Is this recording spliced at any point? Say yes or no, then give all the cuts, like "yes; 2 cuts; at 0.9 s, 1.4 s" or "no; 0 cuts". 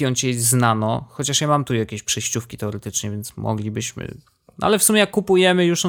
no; 0 cuts